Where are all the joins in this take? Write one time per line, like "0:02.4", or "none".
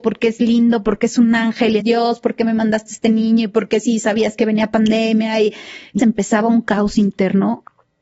0:01.8
0:06.0